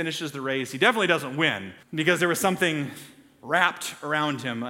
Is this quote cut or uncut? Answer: cut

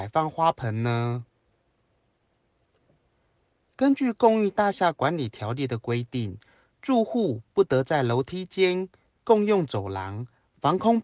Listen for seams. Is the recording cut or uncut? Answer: uncut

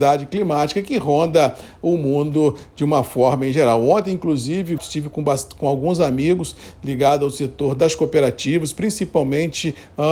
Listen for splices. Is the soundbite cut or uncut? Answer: cut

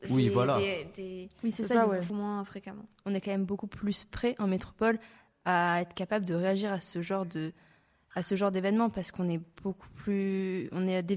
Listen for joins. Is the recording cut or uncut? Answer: cut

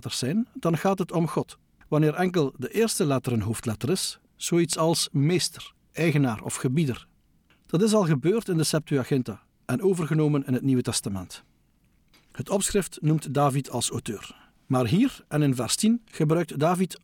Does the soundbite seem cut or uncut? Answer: cut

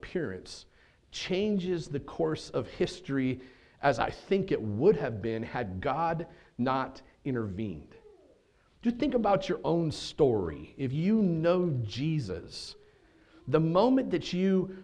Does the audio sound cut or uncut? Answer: uncut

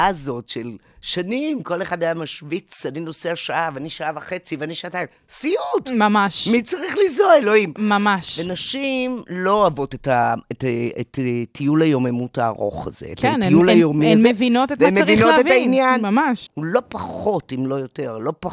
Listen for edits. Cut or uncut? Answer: cut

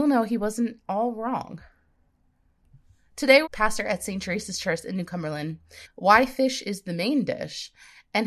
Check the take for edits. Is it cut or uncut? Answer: cut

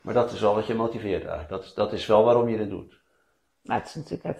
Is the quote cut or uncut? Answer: uncut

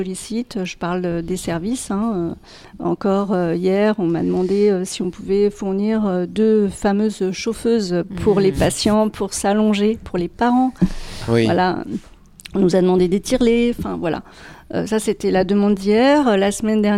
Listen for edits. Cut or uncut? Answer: uncut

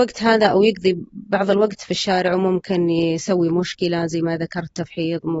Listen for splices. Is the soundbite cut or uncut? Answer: uncut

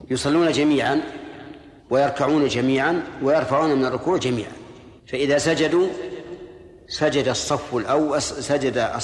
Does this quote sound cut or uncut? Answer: cut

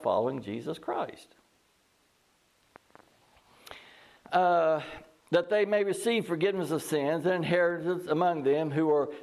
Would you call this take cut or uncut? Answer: uncut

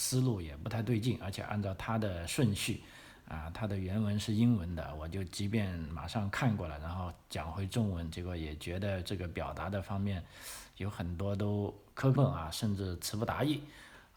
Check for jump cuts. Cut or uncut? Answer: cut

